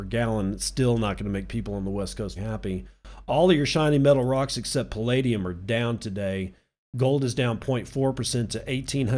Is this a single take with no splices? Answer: no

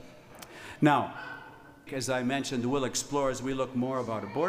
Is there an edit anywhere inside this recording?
yes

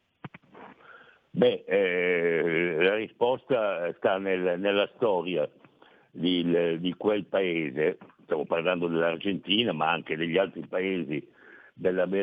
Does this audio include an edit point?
no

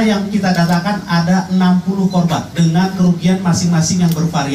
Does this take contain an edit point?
no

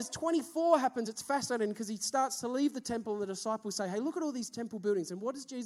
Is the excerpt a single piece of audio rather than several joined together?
yes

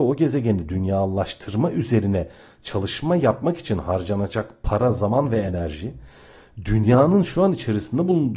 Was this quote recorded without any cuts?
yes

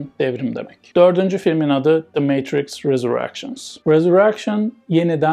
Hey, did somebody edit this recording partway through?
yes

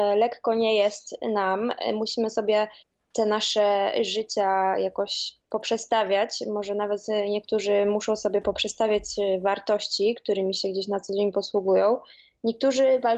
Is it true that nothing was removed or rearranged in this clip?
no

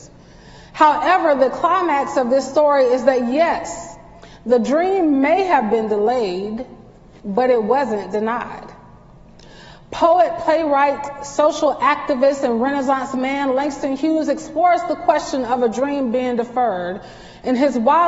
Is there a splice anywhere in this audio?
no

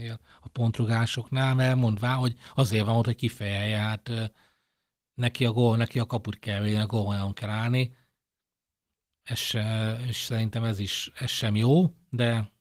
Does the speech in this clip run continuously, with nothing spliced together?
yes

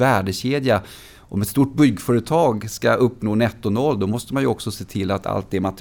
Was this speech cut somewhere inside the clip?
no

